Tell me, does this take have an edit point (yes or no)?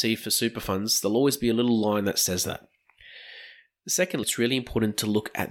yes